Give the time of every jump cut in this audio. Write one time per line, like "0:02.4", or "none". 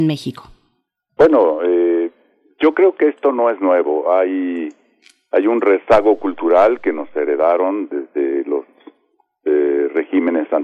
none